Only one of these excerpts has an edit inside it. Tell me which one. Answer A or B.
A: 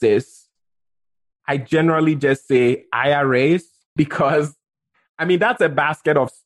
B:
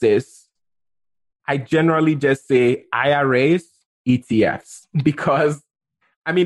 A